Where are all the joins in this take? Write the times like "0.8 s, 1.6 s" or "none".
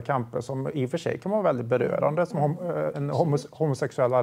2.9 s